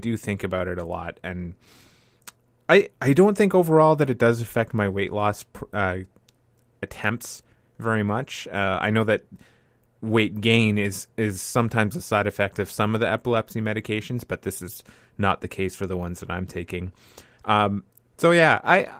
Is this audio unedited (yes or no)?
yes